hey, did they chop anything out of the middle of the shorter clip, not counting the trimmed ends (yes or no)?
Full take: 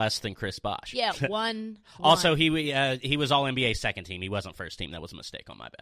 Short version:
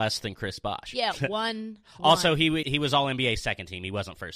yes